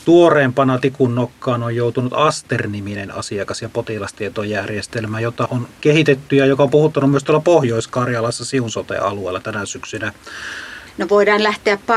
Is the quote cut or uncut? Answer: cut